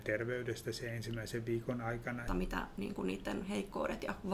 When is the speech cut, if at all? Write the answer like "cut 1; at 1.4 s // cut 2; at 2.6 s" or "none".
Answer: cut 1; at 2.3 s